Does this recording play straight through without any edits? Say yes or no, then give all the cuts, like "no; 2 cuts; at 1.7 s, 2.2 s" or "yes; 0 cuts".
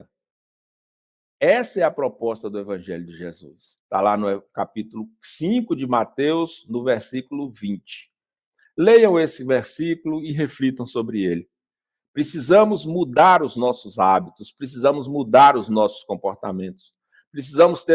no; 1 cut; at 3.8 s